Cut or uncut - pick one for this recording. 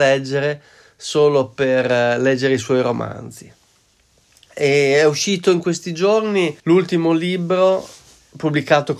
cut